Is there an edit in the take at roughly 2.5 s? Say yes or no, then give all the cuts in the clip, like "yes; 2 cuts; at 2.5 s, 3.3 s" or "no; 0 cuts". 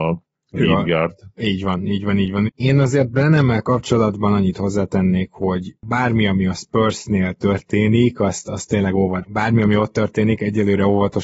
yes; 2 cuts; at 2.5 s, 9.2 s